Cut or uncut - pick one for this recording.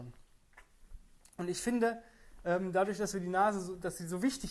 uncut